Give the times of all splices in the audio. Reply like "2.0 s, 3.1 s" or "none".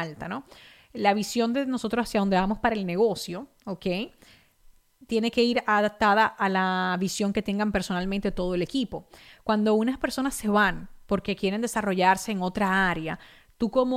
none

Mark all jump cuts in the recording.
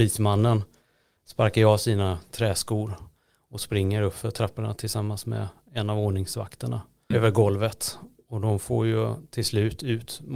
7.1 s

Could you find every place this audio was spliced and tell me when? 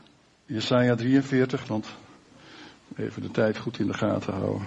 1.6 s

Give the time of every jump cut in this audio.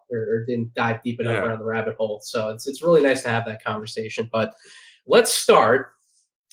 none

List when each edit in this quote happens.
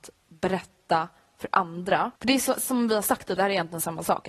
2.2 s, 3.4 s

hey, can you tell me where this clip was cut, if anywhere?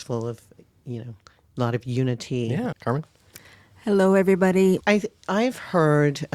2.7 s, 4.8 s

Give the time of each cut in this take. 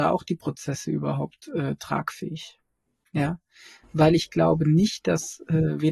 none

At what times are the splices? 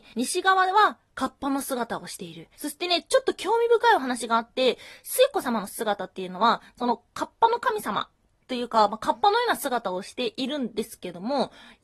2.5 s

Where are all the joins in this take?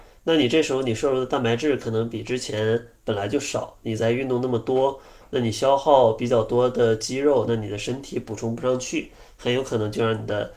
none

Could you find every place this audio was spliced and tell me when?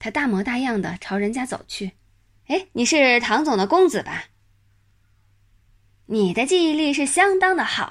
2.4 s

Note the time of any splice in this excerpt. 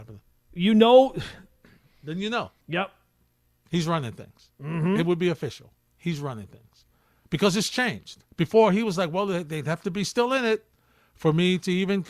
2.6 s, 8.3 s

